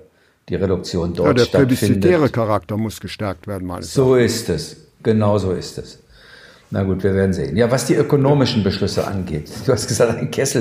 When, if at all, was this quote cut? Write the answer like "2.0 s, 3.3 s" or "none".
none